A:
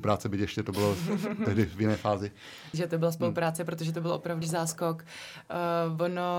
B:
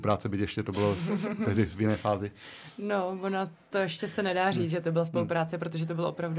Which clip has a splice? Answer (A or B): A